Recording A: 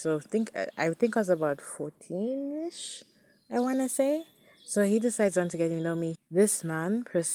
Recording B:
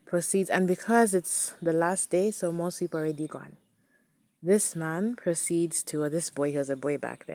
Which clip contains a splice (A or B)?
A